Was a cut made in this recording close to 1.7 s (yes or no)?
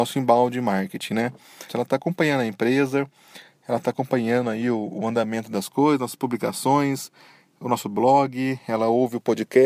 yes